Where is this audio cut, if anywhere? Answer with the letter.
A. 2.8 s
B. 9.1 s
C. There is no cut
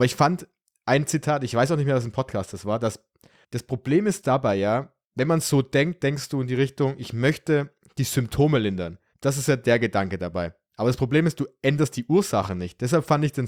B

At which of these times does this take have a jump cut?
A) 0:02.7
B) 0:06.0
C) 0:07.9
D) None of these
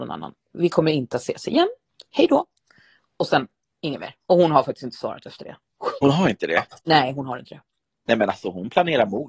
D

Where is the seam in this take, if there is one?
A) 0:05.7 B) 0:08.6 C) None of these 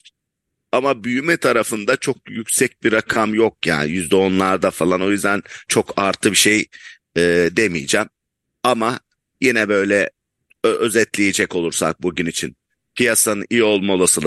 A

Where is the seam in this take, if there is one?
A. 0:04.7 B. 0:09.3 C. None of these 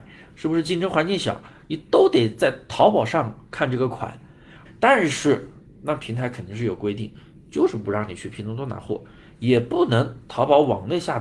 A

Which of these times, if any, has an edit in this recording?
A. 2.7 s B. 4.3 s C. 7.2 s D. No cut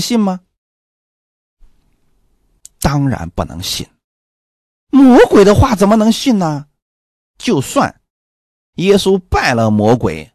C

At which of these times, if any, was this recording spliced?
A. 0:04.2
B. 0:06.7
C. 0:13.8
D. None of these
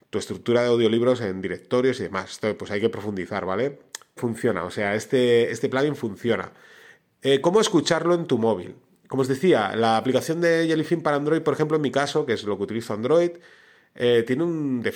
A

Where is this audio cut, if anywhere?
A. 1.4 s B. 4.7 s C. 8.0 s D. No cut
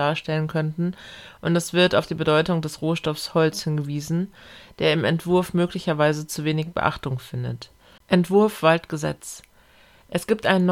C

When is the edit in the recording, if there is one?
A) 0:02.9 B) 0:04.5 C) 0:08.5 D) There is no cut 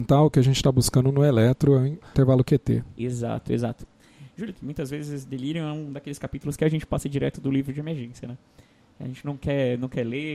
B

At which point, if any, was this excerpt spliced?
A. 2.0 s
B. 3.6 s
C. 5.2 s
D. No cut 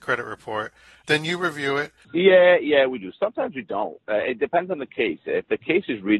A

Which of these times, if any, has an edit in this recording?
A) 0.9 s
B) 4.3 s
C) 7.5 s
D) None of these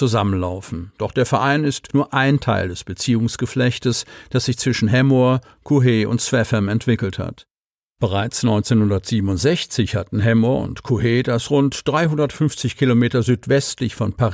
D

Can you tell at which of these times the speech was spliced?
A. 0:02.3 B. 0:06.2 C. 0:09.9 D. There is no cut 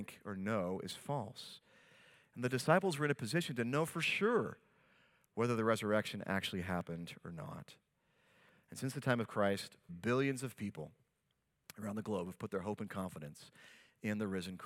C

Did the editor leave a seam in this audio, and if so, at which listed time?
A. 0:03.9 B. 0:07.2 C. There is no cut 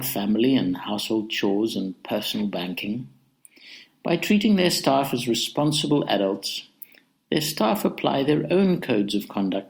A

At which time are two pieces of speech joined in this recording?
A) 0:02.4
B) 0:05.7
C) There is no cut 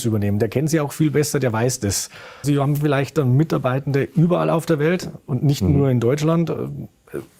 A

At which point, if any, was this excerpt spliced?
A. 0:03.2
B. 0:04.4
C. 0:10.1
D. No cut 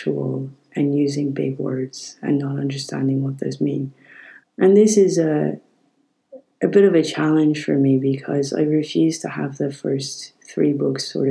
B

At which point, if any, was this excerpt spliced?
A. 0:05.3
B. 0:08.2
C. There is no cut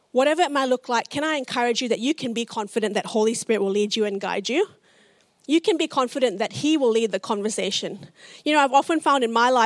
C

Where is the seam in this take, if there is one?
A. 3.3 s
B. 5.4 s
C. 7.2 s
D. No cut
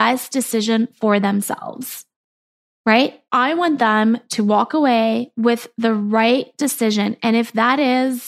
A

